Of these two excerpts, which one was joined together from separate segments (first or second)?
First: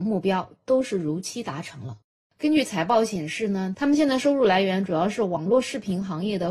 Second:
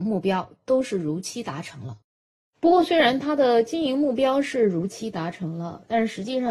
first